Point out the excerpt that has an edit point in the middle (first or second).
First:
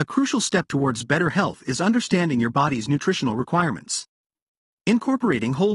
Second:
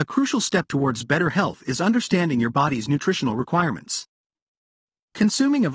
first